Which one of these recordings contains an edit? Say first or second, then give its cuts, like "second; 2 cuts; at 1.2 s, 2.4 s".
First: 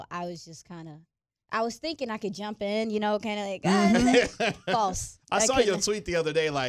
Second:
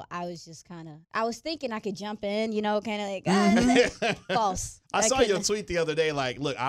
second; 1 cut; at 1.0 s